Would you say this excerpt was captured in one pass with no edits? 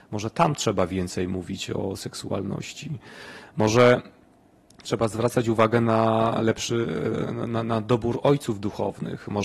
yes; 0 cuts

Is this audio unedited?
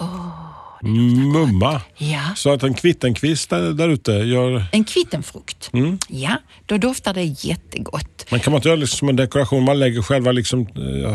yes; 0 cuts

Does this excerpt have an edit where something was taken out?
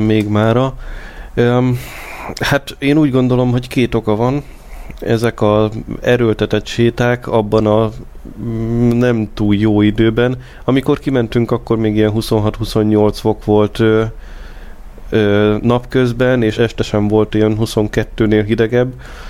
yes; 1 cut; at 16.5 s

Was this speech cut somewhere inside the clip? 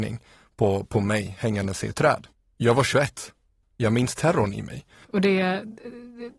yes; 2 cuts; at 3.6 s, 5.0 s

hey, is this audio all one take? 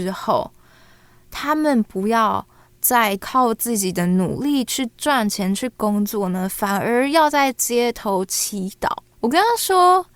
yes; 0 cuts

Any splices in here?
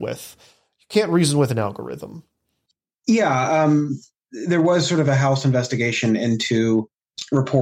no; 0 cuts

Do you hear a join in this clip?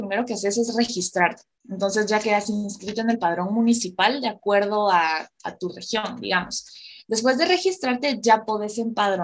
no; 0 cuts

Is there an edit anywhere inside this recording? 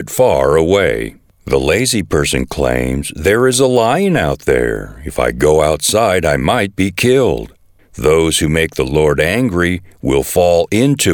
yes; 2 cuts; at 1.3 s, 7.8 s

